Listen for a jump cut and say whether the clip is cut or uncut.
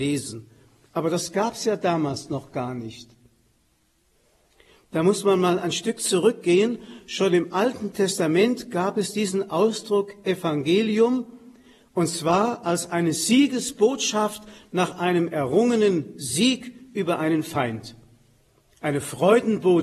uncut